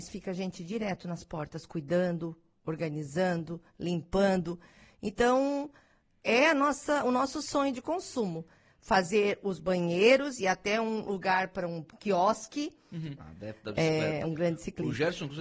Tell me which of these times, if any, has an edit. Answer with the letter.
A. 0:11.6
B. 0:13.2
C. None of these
B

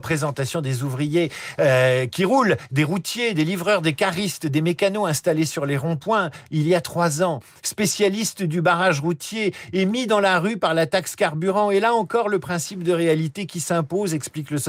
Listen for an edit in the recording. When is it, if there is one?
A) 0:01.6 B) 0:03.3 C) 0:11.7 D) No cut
D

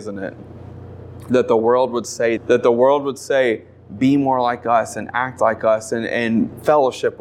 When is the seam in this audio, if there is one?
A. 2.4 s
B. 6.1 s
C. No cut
A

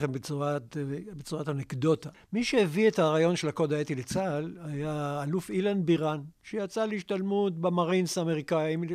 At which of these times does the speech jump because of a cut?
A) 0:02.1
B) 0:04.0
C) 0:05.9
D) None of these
A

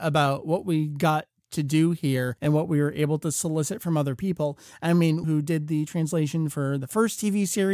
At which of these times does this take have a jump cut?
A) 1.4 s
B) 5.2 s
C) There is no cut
B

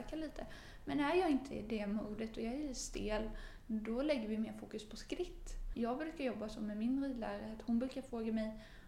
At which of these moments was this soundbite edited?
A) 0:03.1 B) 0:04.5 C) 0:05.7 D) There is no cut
C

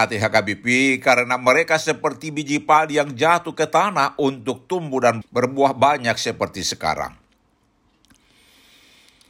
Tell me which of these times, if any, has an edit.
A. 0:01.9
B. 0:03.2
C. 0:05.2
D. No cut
C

